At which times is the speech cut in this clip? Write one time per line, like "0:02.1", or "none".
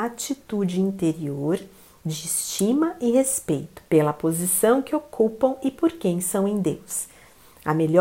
0:03.9